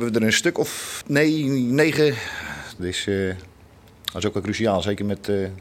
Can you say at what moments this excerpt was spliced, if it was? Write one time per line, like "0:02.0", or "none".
0:01.0
0:02.8